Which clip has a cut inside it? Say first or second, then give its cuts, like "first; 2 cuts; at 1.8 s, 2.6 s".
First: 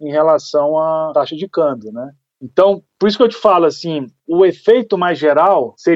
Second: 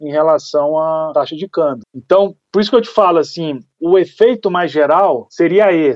second; 1 cut; at 1.8 s